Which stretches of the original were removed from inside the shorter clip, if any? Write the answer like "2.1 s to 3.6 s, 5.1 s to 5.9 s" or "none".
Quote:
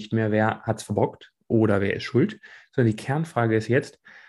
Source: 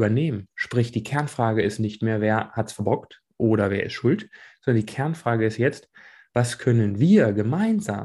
none